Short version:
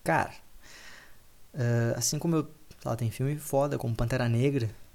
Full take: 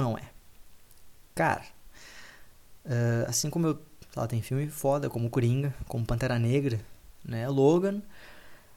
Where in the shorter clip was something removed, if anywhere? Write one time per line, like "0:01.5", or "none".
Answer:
0:03.8